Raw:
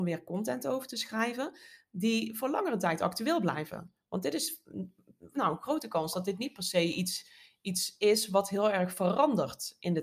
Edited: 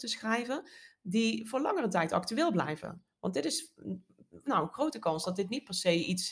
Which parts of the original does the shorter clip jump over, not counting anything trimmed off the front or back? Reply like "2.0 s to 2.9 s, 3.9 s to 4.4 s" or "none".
none